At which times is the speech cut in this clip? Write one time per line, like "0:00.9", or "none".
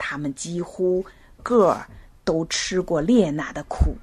0:01.4